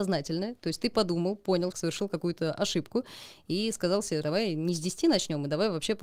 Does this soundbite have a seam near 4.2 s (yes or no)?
yes